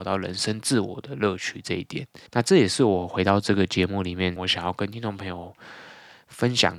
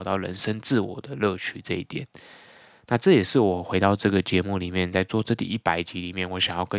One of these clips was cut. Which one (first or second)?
first